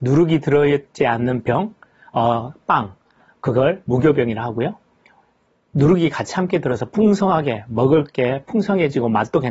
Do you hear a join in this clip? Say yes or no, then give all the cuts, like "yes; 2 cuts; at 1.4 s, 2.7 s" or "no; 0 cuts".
no; 0 cuts